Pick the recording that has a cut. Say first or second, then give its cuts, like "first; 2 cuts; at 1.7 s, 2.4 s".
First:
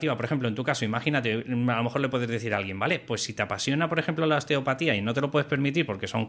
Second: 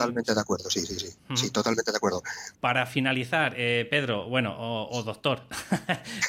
second; 1 cut; at 2.5 s